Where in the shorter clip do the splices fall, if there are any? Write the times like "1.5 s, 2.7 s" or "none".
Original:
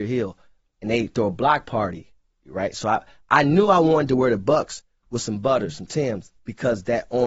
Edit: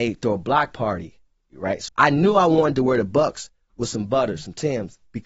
1.9 s

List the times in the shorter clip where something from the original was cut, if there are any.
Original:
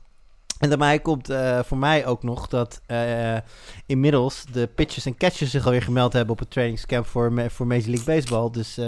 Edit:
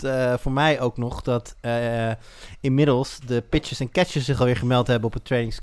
none

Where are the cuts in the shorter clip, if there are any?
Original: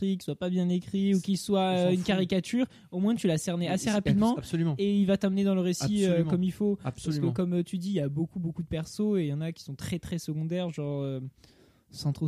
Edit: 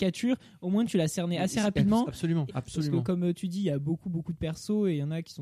2.5 s

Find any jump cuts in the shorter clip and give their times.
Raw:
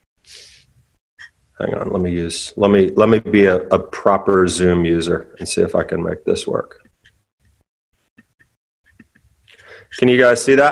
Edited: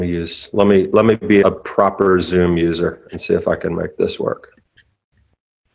1.4 s

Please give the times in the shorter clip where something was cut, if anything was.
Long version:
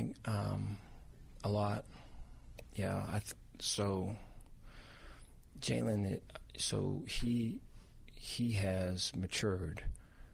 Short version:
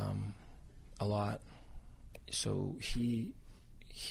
2.3 s

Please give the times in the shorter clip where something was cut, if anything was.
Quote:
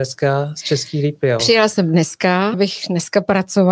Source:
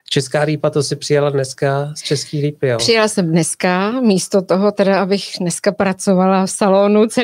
2.5 s

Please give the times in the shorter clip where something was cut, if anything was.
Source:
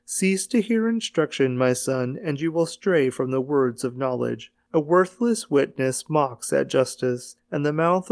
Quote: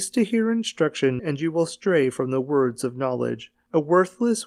1.2 s

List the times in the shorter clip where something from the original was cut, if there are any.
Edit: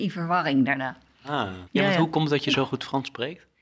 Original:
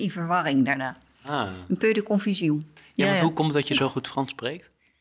1.7 s

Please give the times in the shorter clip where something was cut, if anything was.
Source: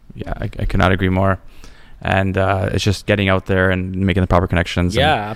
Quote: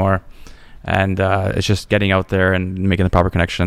none

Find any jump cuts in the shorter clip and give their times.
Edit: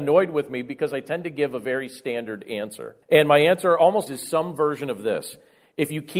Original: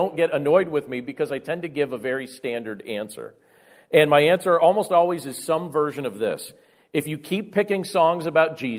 3.0 s, 4.1 s

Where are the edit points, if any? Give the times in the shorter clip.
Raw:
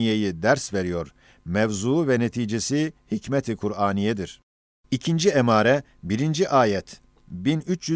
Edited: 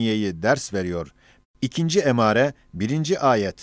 1.4 s

